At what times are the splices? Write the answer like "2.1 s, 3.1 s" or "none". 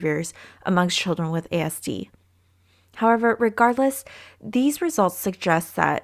none